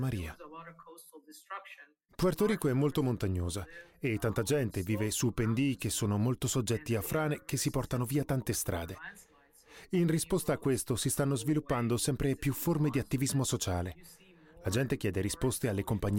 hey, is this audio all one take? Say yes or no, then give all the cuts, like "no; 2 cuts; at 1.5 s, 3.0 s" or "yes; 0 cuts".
no; 1 cut; at 2.1 s